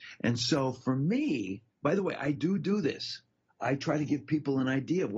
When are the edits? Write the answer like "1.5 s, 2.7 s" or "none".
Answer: 1.7 s